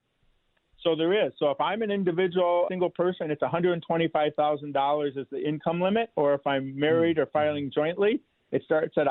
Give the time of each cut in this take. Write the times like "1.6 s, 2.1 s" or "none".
2.7 s

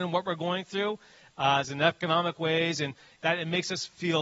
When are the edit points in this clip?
1.6 s, 3.2 s

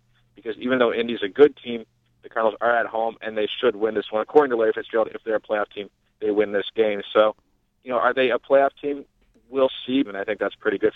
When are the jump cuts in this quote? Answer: 10.0 s

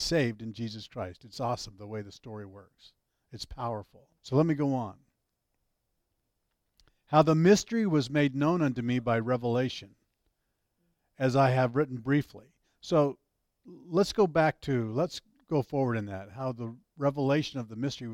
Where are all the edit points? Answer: 4.2 s

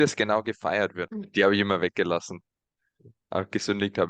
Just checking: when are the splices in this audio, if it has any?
1.1 s

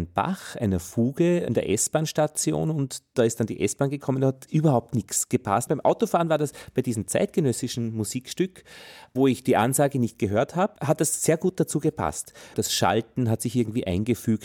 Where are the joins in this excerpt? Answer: 5.7 s, 12.5 s

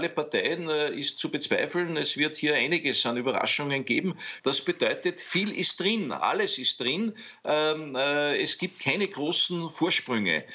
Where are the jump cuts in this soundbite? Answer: 4.4 s

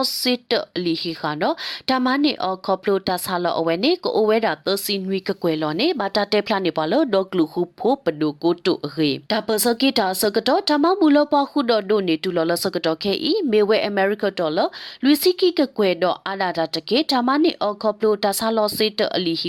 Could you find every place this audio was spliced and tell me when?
9.3 s

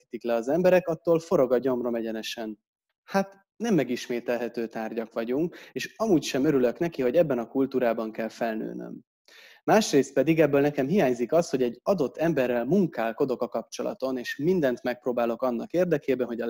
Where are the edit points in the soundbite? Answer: 2.9 s

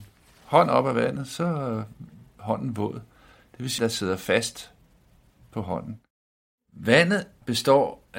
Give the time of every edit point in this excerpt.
3.8 s

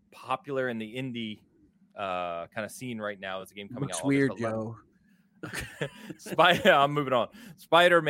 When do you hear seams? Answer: none

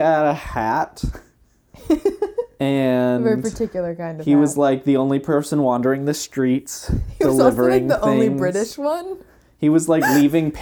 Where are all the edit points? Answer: none

